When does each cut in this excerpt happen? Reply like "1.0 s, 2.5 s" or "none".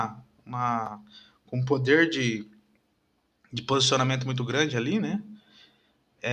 none